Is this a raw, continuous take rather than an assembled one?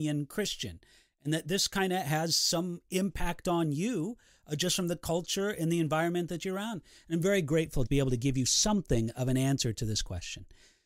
no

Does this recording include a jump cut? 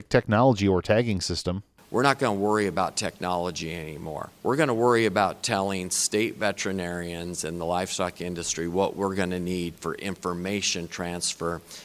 no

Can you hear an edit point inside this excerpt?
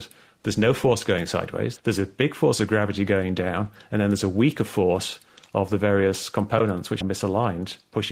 yes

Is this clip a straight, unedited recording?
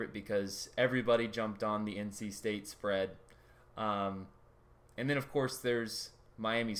yes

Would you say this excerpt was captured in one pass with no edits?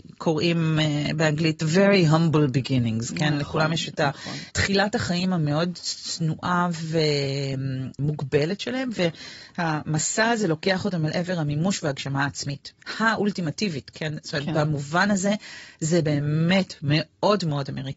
yes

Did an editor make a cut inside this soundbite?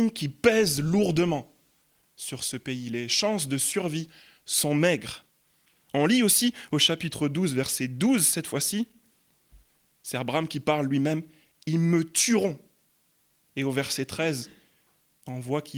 no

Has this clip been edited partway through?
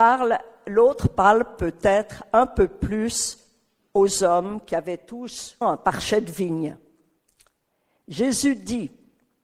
yes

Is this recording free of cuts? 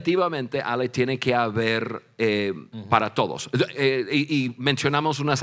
no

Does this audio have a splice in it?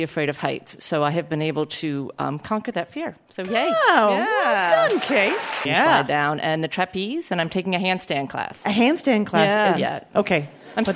yes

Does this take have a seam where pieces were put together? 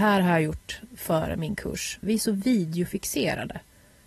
yes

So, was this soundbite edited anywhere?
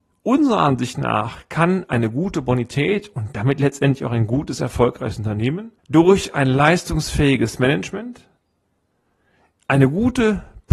yes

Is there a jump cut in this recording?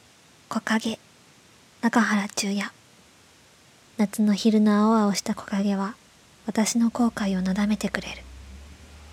yes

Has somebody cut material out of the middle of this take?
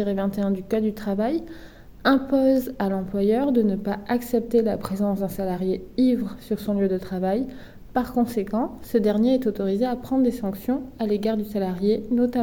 no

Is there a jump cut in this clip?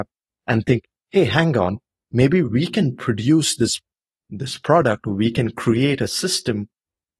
no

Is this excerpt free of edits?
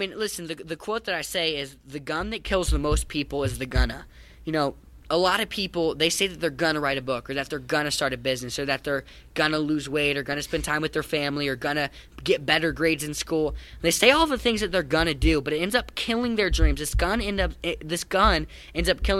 yes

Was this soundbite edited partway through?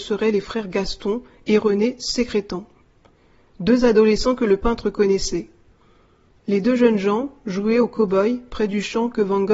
no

